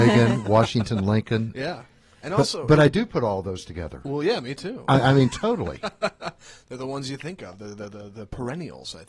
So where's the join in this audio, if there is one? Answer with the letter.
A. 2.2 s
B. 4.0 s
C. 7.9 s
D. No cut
D